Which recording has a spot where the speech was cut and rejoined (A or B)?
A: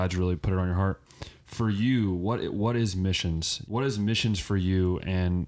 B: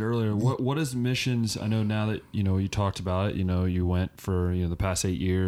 A